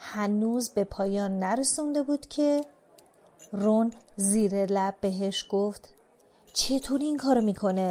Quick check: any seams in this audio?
no; 0 cuts

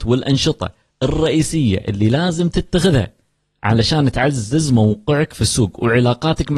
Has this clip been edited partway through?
no; 0 cuts

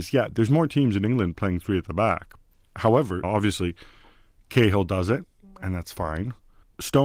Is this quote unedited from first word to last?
no; 1 cut; at 3.2 s

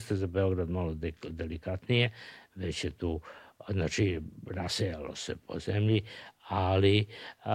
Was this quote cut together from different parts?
no; 0 cuts

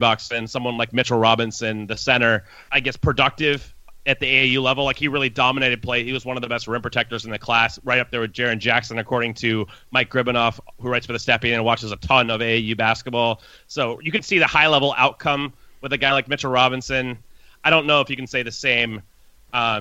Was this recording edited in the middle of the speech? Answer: yes; 1 cut; at 2.7 s

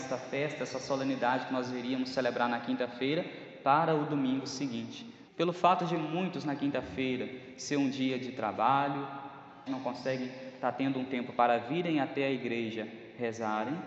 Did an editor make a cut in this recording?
yes; 2 cuts; at 5.3 s, 9.7 s

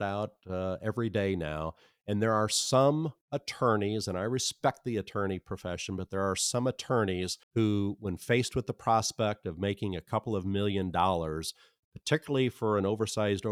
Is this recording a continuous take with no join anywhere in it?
no; 1 cut; at 7.4 s

